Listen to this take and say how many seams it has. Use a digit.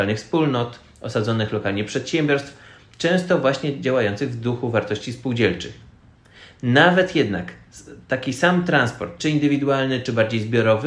1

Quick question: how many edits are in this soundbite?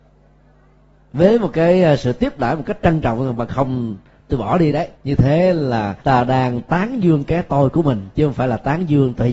2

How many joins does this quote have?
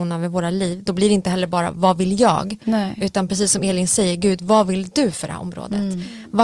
0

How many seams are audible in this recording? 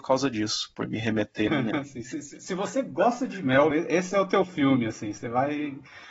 2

